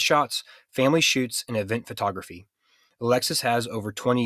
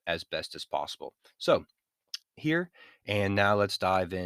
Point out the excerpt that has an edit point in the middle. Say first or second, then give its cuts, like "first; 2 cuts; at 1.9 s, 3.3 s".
second; 1 cut; at 2.2 s